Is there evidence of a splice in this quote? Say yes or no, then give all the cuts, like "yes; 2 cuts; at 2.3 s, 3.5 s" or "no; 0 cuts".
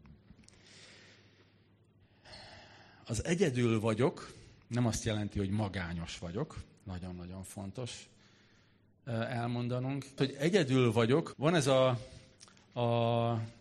yes; 2 cuts; at 10.2 s, 11.3 s